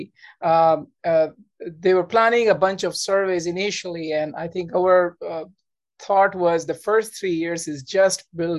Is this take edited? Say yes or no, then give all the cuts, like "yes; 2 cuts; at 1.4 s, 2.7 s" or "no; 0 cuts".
no; 0 cuts